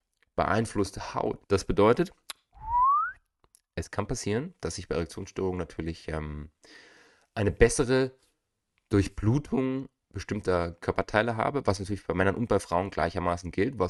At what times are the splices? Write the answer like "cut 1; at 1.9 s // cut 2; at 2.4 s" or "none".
cut 1; at 1.4 s